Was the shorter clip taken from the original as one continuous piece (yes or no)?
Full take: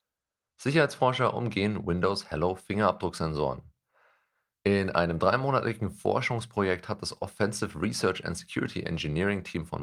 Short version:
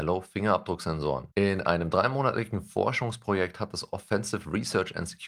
no